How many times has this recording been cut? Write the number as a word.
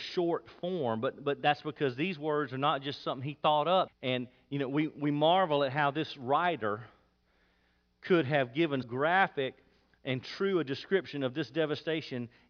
two